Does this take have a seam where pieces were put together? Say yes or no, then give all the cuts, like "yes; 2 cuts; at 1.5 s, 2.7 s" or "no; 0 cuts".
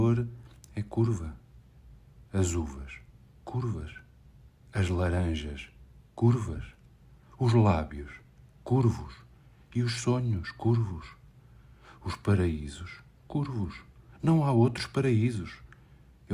no; 0 cuts